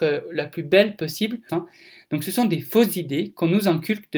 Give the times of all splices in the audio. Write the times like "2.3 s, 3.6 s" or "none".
1.5 s